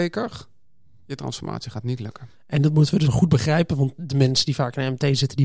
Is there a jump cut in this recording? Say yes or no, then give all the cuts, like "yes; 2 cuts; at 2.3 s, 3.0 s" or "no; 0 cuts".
yes; 1 cut; at 3.0 s